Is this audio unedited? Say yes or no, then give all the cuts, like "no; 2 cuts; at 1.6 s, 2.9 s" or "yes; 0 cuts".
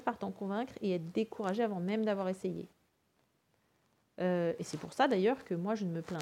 yes; 0 cuts